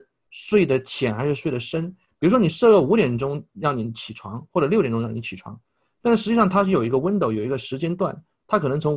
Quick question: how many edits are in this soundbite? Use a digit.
0